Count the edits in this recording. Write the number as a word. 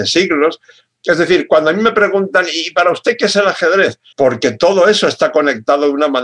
one